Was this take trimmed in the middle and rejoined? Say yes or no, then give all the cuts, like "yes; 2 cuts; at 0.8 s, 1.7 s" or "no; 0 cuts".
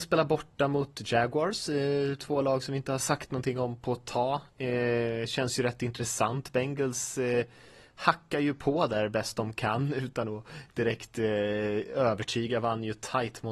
no; 0 cuts